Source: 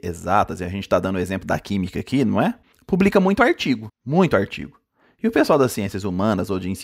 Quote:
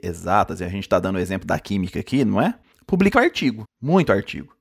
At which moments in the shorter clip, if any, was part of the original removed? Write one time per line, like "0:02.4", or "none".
0:03.1